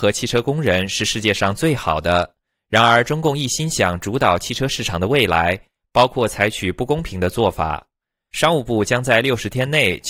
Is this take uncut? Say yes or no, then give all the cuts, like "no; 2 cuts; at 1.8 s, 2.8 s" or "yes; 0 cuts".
yes; 0 cuts